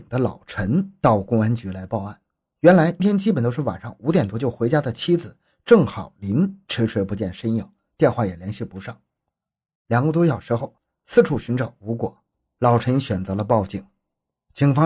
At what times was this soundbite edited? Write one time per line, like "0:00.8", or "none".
0:03.0